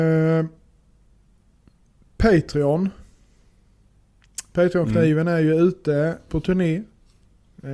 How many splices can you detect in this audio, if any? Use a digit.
1